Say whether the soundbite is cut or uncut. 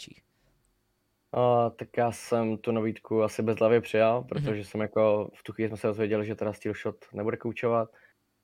uncut